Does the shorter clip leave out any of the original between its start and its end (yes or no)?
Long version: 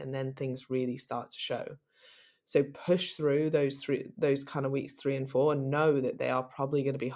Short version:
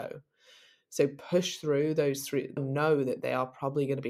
yes